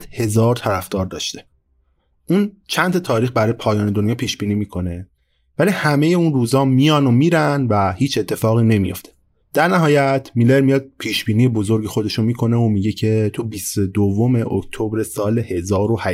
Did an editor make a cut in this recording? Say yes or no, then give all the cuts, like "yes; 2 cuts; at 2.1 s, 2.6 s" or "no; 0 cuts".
no; 0 cuts